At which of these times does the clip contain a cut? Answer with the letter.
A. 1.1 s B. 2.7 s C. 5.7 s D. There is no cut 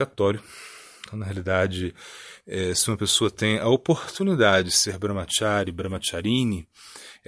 D